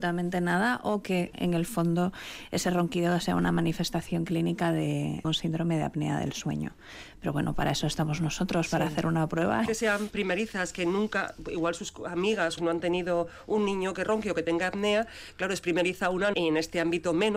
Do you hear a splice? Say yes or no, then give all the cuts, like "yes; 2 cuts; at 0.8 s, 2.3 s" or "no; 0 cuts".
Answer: yes; 3 cuts; at 9.7 s, 12.6 s, 16.3 s